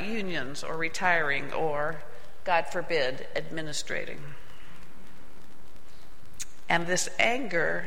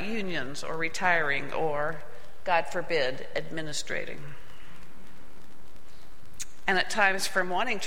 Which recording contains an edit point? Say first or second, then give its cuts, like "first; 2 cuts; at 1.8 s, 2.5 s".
second; 1 cut; at 6.7 s